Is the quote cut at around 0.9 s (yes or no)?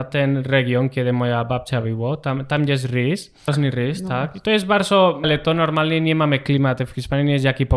no